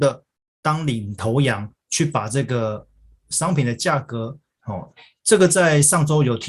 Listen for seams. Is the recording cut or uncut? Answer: cut